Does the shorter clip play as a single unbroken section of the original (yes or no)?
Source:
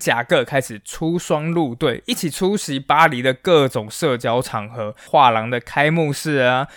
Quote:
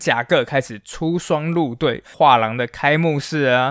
no